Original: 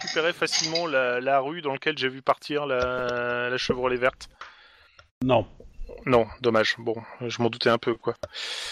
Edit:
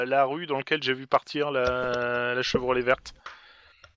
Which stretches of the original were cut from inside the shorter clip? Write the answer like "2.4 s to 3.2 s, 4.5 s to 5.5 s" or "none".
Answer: none